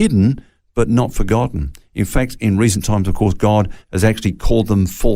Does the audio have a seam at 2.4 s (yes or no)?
no